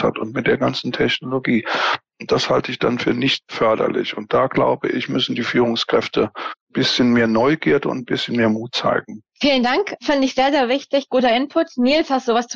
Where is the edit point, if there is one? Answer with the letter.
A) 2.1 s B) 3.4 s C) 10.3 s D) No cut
B